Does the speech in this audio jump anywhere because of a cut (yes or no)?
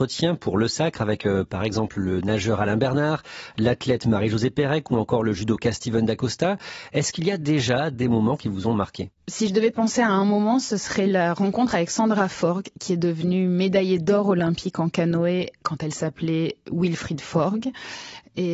no